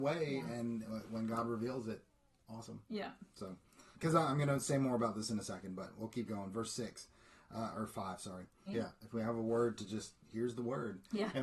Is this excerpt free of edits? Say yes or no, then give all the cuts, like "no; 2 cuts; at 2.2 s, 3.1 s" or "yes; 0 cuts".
no; 2 cuts; at 3.9 s, 8.7 s